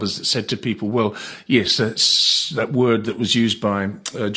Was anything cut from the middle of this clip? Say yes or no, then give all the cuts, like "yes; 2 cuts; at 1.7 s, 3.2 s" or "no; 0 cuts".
no; 0 cuts